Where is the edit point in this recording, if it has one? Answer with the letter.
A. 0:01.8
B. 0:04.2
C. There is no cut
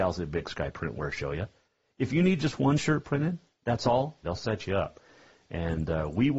B